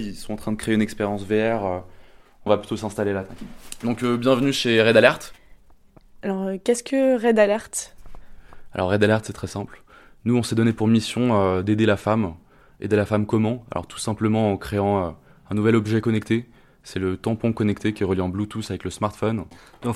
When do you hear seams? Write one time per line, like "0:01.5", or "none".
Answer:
none